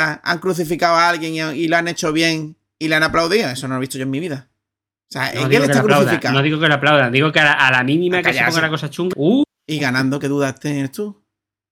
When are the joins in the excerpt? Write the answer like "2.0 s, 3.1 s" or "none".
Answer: 9.1 s